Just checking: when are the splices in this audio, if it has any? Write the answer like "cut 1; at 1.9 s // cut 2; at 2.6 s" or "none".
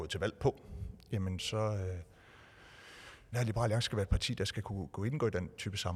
cut 1; at 1.4 s // cut 2; at 3.3 s